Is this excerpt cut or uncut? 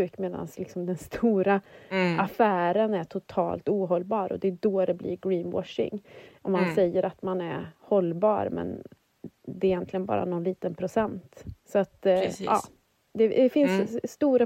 uncut